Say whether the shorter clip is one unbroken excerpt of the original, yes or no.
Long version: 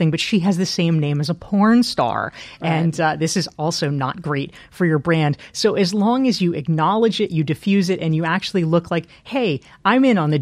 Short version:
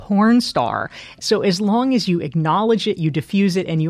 no